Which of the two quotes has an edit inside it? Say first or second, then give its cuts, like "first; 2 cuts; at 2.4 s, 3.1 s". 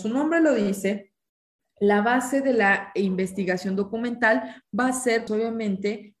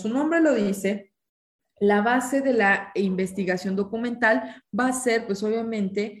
first; 1 cut; at 5.3 s